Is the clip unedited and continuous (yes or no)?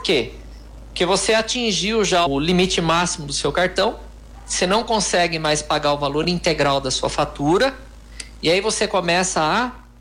no